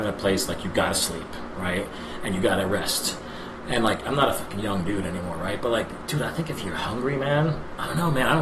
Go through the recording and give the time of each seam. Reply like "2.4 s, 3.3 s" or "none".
none

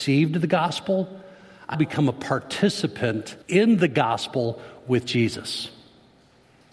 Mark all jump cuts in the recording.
1.7 s, 3.4 s

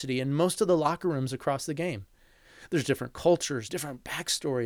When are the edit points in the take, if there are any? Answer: 3.7 s

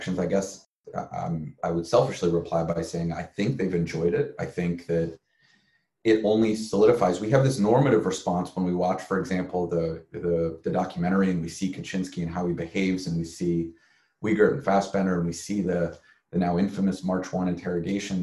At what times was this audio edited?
none

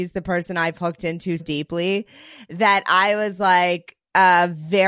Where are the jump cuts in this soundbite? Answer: 1.4 s

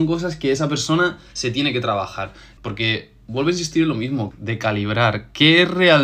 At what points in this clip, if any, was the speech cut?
2.6 s, 4.3 s

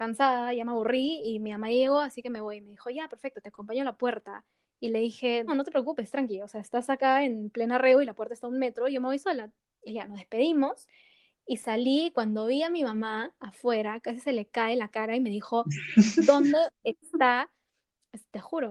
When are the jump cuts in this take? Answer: 5.5 s, 9.9 s

